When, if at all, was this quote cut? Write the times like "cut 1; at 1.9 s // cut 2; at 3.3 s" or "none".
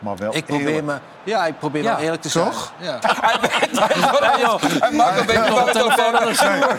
cut 1; at 3.0 s